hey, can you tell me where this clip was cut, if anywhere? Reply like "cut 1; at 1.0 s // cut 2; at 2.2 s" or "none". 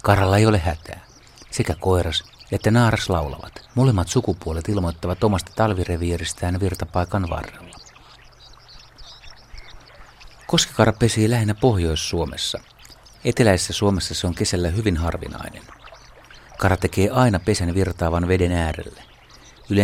cut 1; at 1.4 s // cut 2; at 3.6 s

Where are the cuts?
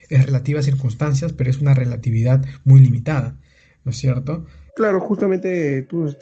cut 1; at 4.7 s

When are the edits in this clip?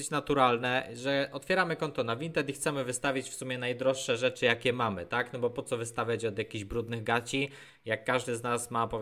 none

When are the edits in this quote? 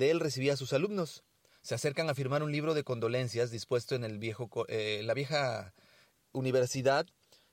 cut 1; at 1.5 s

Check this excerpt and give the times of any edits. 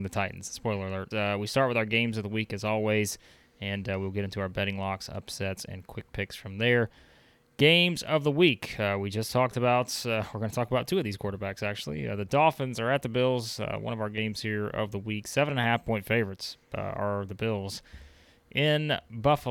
cut 1; at 1.1 s

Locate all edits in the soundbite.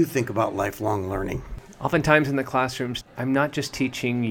cut 1; at 3.0 s

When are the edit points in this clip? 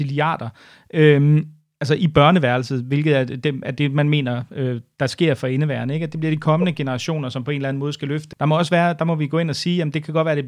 cut 1; at 8.3 s

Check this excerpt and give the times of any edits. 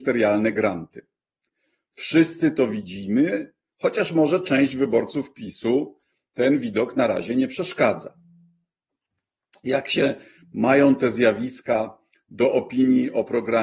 none

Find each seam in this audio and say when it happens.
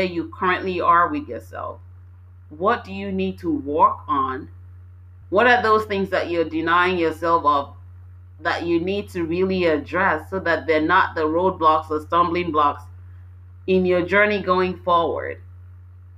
cut 1; at 5.2 s

